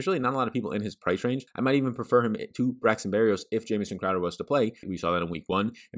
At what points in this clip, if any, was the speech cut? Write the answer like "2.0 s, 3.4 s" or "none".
1.5 s, 4.8 s